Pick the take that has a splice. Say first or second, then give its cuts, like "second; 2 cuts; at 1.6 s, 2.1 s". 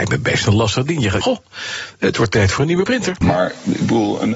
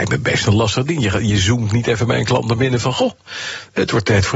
first; 2 cuts; at 1.2 s, 3.2 s